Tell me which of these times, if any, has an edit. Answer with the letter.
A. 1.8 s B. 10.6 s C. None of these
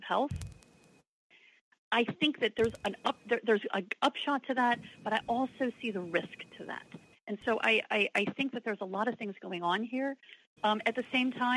B